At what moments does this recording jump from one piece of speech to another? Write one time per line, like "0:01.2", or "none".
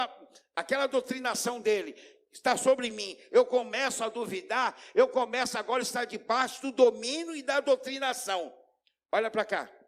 none